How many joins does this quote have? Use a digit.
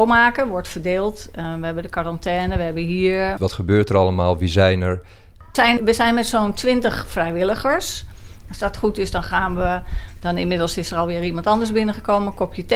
3